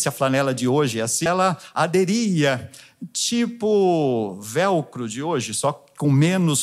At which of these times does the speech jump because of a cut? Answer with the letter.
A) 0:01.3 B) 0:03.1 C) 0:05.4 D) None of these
A